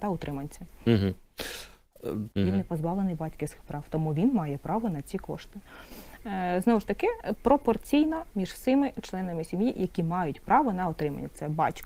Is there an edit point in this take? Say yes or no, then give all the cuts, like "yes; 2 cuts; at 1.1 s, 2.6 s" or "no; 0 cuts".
yes; 2 cuts; at 2.3 s, 7.3 s